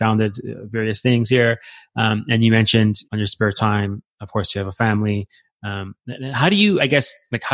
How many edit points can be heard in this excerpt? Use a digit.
1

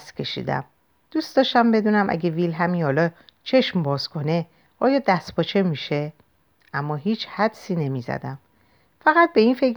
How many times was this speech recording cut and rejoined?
0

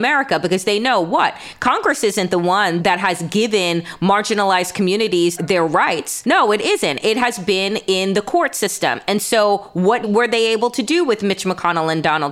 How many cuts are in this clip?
0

